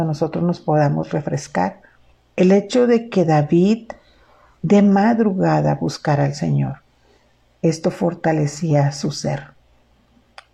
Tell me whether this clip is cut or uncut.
cut